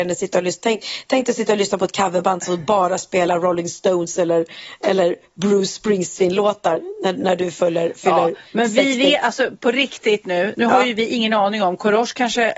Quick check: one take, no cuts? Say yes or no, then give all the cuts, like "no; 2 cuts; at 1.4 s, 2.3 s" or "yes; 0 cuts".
yes; 0 cuts